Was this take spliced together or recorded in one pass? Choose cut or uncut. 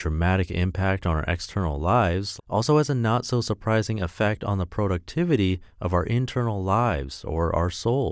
cut